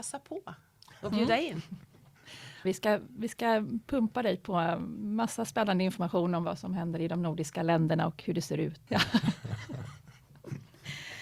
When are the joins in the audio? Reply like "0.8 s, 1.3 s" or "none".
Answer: 2.6 s, 8.9 s